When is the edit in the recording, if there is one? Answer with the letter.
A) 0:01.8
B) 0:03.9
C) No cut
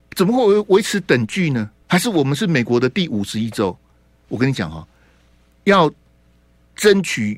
A